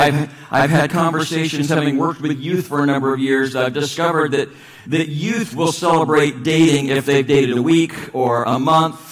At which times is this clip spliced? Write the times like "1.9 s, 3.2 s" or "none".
none